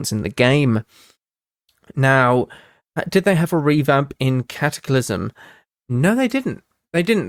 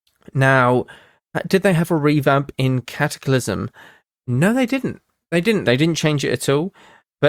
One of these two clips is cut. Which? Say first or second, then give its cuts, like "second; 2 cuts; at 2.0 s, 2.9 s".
second; 1 cut; at 5.6 s